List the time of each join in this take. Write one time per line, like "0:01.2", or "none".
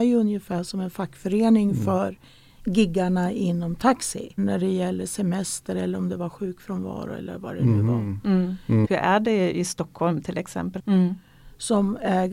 0:04.4
0:08.8
0:10.8